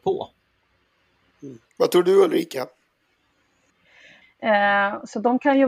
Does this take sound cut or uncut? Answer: cut